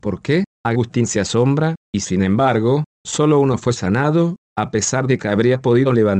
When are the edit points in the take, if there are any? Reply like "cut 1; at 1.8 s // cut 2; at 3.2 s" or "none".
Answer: cut 1; at 1.8 s

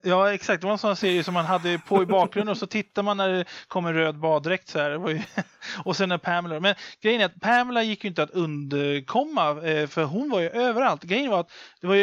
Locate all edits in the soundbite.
none

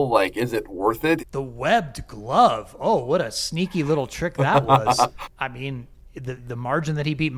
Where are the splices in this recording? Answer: cut 1; at 1.2 s // cut 2; at 5.2 s // cut 3; at 6.4 s

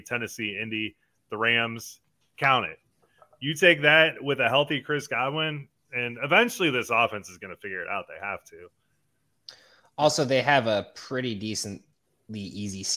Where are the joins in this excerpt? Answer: cut 1; at 2.3 s

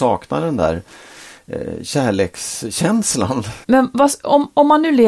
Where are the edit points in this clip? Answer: none

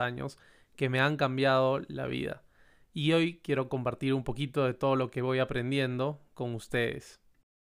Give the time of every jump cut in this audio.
none

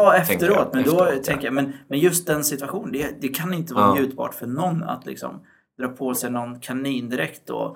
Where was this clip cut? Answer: none

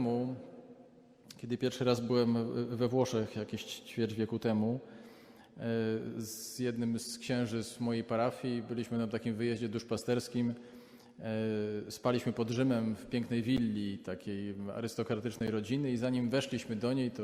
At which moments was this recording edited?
none

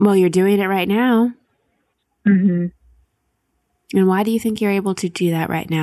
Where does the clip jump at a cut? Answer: none

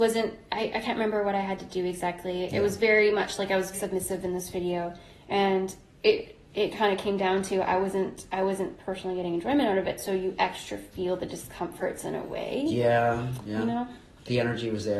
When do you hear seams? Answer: cut 1; at 3.7 s

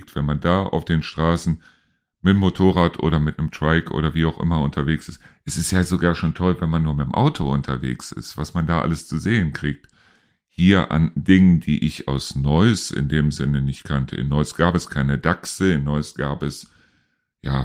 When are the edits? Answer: none

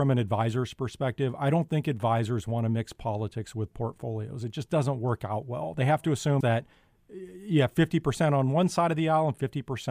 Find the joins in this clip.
cut 1; at 6.4 s

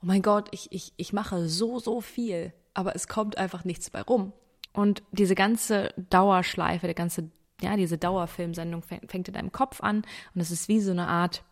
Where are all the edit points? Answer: cut 1; at 4.7 s

